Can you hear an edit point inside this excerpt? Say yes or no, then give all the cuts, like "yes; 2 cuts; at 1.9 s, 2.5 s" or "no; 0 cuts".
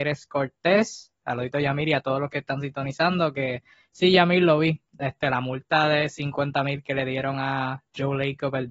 no; 0 cuts